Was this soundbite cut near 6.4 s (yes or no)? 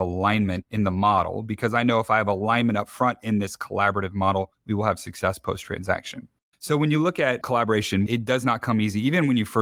no